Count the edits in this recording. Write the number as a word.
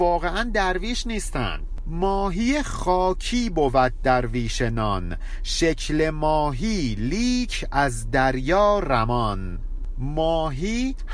zero